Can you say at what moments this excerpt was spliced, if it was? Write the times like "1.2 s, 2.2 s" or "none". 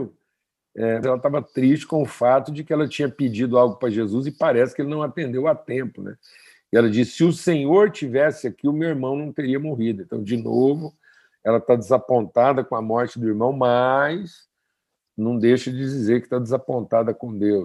1.0 s